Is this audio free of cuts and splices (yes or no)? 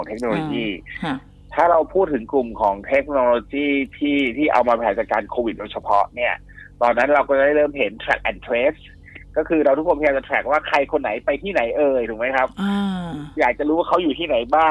yes